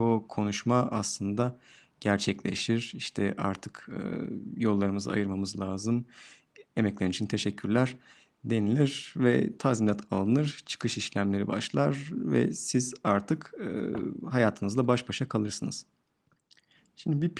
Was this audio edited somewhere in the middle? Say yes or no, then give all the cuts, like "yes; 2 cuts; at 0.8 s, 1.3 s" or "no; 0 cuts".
no; 0 cuts